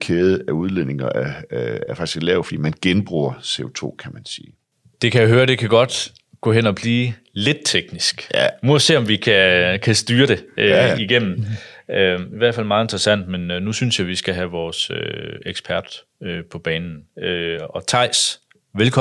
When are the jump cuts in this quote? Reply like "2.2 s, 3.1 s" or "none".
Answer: none